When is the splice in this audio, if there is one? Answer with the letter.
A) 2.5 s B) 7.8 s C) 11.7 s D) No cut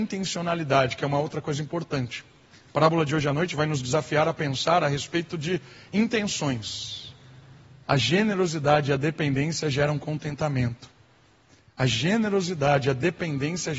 B